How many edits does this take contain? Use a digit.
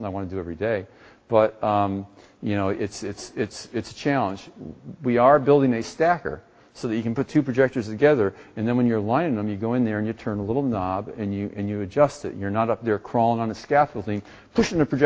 0